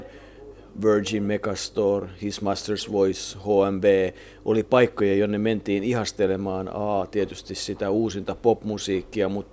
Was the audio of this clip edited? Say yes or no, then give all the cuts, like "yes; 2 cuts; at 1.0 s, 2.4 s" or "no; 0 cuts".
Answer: no; 0 cuts